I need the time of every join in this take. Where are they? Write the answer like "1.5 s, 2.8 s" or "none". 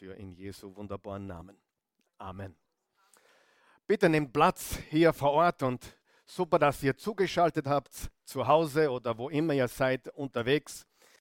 none